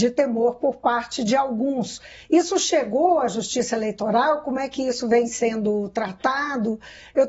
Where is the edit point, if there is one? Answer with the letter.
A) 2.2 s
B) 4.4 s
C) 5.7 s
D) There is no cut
D